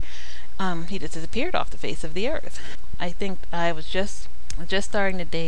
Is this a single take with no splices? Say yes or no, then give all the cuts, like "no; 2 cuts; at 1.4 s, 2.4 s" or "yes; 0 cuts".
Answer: yes; 0 cuts